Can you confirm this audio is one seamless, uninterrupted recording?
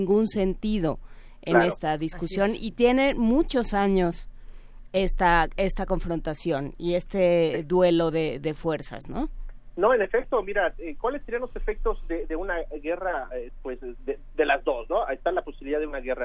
yes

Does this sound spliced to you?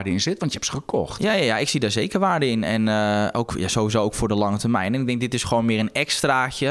no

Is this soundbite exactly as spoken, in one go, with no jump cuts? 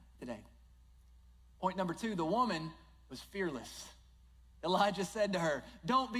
yes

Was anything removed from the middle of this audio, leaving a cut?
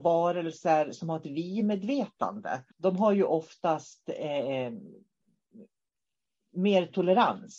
yes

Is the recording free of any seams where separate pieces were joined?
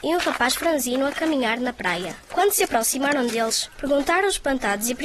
yes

